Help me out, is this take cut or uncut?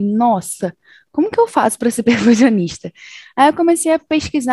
uncut